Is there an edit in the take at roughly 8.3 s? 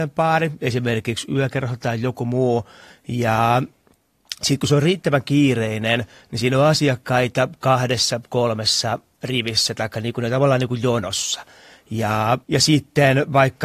no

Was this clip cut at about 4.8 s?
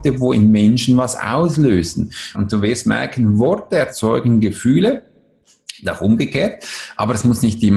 no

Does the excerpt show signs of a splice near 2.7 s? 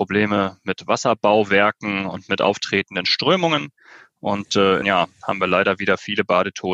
no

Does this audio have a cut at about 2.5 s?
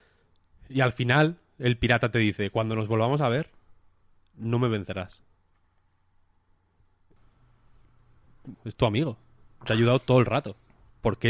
no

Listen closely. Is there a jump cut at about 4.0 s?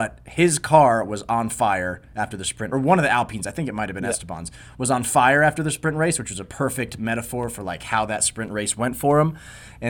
no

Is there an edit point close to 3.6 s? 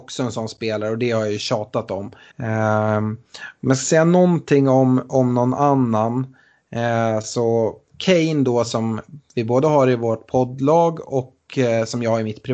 no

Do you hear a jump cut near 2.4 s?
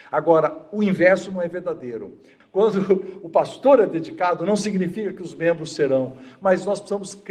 yes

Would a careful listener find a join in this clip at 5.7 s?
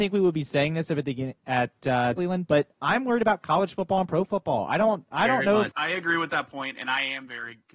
yes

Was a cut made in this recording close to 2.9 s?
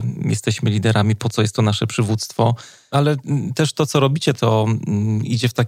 yes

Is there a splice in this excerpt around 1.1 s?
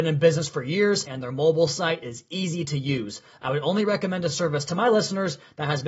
yes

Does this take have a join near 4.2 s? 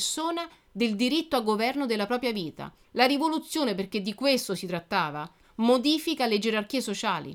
no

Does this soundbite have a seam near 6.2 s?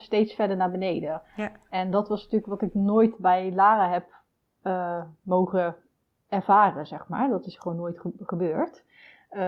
no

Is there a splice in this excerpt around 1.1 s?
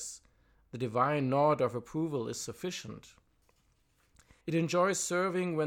no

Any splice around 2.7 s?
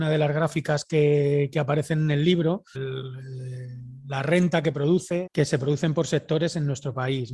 yes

